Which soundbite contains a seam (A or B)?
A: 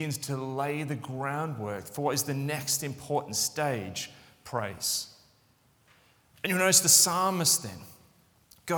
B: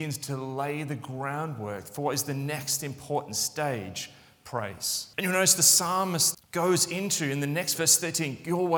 B